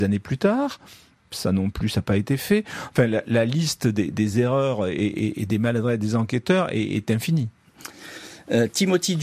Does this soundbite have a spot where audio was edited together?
no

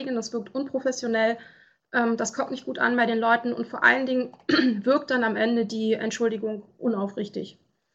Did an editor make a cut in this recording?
no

